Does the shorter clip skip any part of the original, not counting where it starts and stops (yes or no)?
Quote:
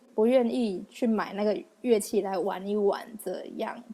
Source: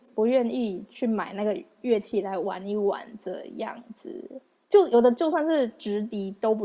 no